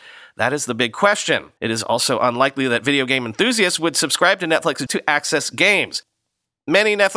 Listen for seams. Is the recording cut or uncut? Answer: cut